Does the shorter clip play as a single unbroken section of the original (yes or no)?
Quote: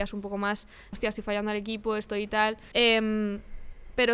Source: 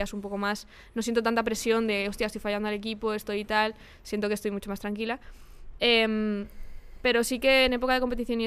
no